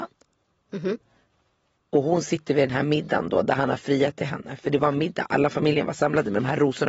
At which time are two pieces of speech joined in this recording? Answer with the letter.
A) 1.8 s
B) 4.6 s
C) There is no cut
C